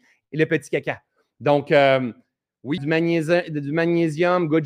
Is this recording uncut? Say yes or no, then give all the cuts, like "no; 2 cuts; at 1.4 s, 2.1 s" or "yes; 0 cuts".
no; 2 cuts; at 1.4 s, 2.8 s